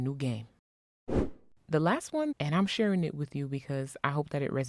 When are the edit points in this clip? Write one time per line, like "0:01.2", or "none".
0:02.3

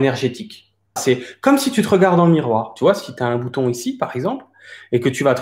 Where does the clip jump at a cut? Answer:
0:01.0

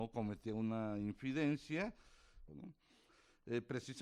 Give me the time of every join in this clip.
0:02.5

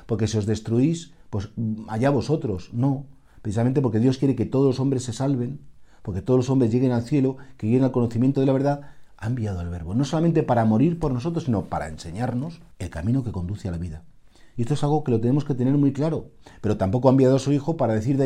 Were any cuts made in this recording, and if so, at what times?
0:12.7
0:14.6

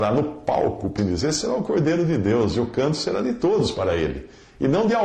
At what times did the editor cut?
0:01.0

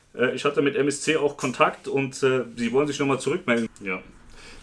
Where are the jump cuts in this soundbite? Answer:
0:03.7

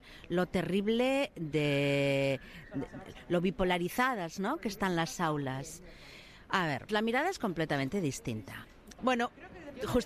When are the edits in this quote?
0:06.9
0:09.0

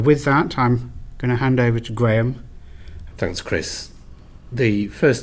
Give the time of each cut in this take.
0:03.1

